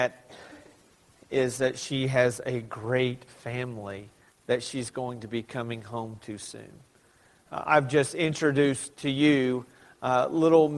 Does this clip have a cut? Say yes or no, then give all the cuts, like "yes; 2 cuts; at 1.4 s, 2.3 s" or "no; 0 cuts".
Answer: no; 0 cuts